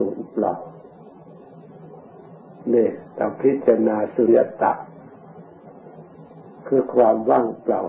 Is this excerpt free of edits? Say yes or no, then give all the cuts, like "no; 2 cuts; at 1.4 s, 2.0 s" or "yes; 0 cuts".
no; 1 cut; at 4.3 s